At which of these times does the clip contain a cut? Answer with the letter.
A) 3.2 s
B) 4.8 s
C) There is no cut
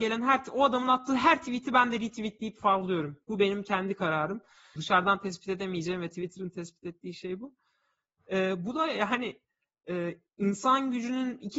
B